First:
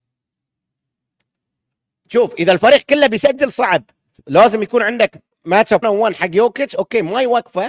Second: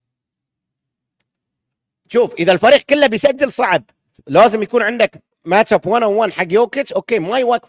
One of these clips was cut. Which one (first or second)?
first